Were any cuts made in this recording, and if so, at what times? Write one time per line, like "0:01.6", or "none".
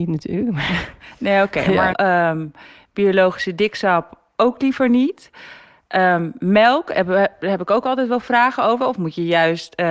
0:01.9
0:08.8

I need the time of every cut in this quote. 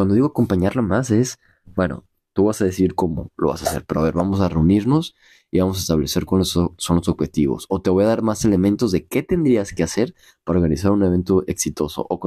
none

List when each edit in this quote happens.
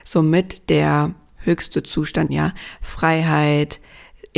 0:02.3

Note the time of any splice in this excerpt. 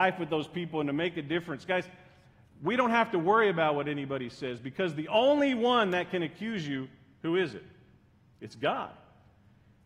none

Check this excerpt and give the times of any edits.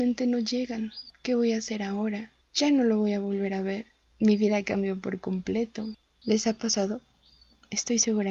0:04.1
0:06.0

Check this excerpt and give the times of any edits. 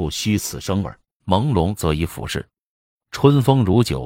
0:01.2

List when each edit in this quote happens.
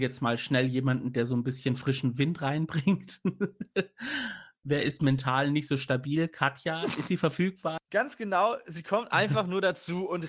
0:07.8

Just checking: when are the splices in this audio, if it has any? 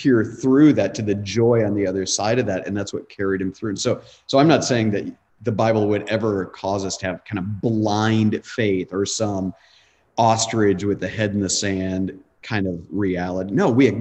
none

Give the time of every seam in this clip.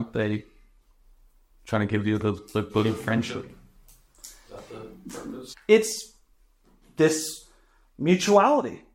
0:05.5

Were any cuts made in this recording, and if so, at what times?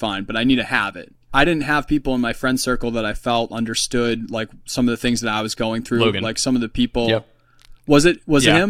0:01.2

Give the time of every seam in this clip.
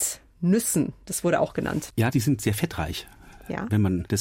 0:01.9

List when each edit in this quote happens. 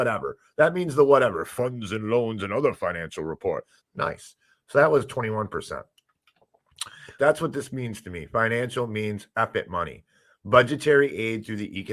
0:03.8
0:07.2

